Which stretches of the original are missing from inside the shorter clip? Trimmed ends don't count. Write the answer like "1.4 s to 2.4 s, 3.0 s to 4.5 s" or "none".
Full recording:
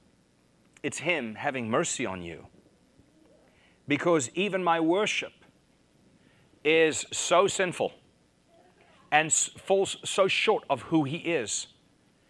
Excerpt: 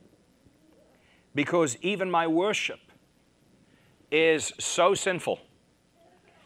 none